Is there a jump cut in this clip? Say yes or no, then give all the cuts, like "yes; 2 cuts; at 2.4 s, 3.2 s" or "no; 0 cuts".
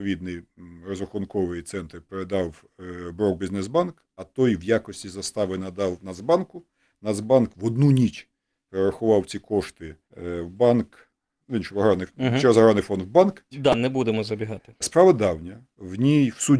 yes; 3 cuts; at 10.0 s, 13.5 s, 14.8 s